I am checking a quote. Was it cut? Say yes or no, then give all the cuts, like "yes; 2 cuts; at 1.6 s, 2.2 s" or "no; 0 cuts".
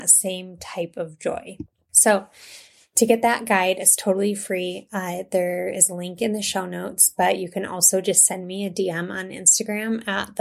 no; 0 cuts